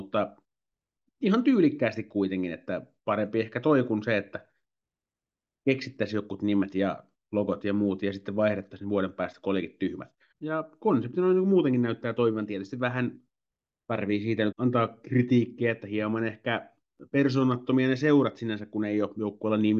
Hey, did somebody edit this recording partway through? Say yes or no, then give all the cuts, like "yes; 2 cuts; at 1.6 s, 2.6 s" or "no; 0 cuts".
yes; 2 cuts; at 10.3 s, 14.5 s